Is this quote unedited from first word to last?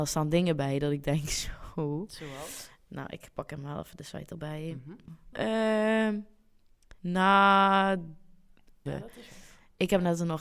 no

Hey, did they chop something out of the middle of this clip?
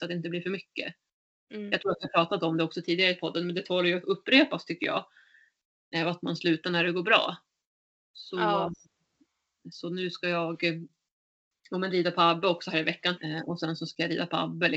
yes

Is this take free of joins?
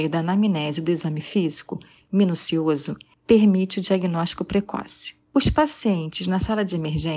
yes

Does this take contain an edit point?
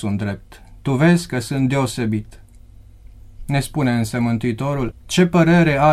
yes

